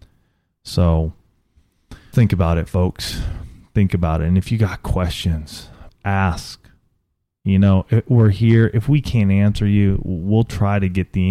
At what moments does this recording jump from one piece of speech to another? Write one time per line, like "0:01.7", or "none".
0:02.1
0:05.9